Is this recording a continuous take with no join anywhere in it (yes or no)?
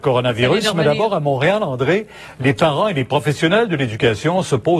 yes